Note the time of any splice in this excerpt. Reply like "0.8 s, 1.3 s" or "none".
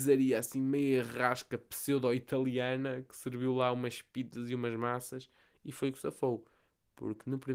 none